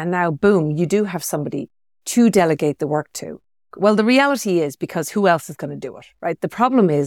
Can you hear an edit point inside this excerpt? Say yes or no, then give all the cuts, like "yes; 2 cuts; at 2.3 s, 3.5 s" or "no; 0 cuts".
yes; 1 cut; at 3.7 s